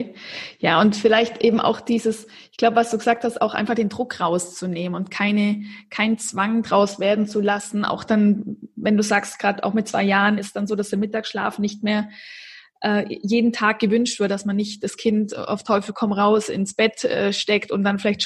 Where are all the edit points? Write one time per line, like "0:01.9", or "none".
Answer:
0:14.3